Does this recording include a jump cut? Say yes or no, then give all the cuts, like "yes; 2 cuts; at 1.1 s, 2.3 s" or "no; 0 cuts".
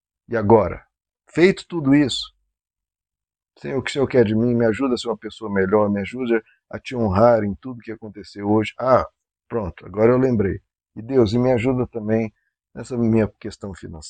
no; 0 cuts